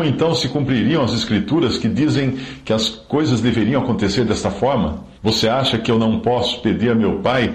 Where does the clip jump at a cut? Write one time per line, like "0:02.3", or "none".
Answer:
0:05.2

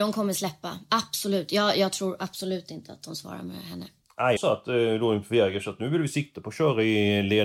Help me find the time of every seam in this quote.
0:04.4

